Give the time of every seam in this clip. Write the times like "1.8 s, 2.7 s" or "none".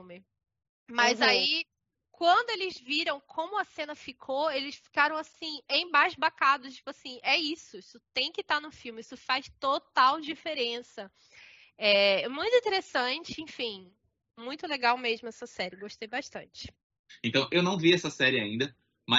none